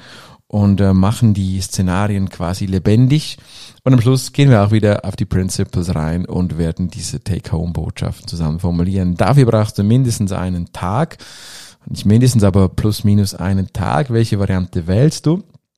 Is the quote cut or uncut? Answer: uncut